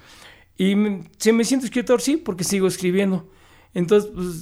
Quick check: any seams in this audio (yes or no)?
no